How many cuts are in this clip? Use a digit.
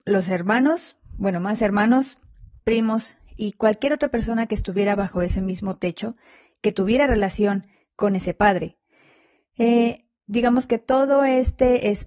1